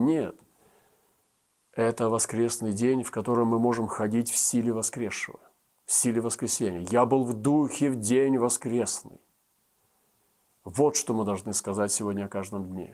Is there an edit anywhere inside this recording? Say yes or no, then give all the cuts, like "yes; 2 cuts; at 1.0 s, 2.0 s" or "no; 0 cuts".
no; 0 cuts